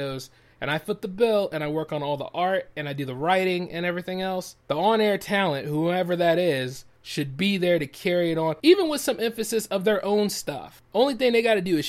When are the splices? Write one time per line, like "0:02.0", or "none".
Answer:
none